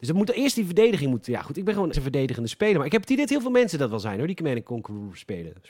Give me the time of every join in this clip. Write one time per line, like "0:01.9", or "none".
0:01.9